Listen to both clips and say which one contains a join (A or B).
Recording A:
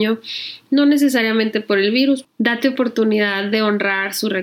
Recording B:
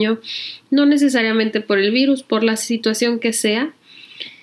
A